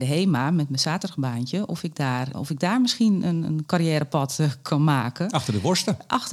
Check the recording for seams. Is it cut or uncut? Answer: cut